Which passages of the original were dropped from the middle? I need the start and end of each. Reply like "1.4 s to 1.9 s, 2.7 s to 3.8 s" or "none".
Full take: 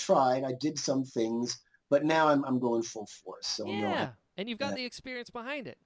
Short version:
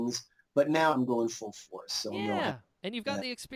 2.3 s to 2.4 s